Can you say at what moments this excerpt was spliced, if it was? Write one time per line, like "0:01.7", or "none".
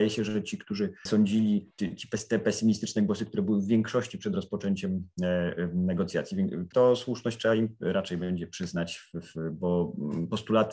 0:06.7